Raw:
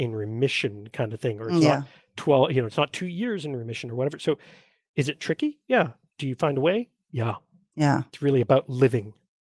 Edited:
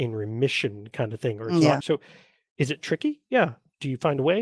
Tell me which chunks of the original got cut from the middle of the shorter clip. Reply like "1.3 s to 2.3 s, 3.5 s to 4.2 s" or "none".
1.8 s to 4.2 s

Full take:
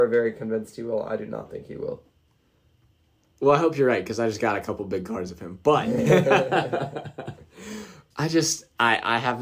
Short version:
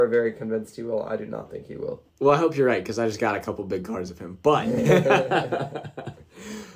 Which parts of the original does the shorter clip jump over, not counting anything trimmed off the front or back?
2.1 s to 3.3 s

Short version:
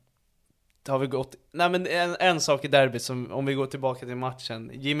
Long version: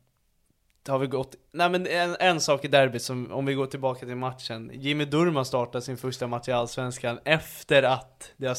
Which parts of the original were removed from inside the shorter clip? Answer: none

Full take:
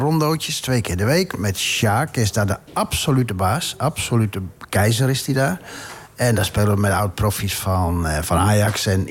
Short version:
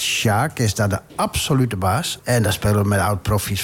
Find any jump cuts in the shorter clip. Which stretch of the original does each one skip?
3.8 s to 6.1 s

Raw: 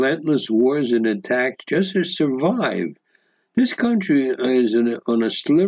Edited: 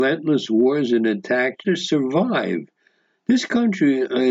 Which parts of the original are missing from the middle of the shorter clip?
1.6 s to 1.9 s

